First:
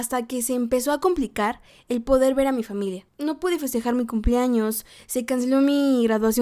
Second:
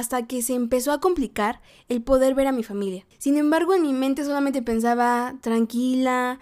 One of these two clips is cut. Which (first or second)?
first